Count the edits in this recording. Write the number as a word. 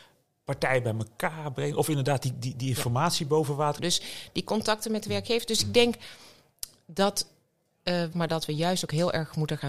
two